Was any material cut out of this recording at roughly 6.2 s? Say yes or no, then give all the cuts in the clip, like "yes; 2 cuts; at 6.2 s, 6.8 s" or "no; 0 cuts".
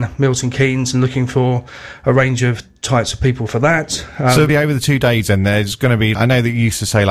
yes; 2 cuts; at 4.5 s, 6.2 s